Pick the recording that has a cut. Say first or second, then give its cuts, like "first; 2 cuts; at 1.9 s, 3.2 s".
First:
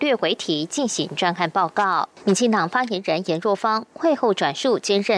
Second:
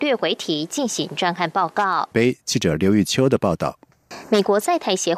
second; 1 cut; at 2.1 s